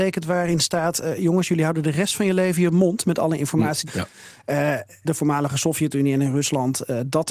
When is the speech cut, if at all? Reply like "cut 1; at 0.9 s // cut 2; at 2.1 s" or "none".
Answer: cut 1; at 3.9 s // cut 2; at 5.0 s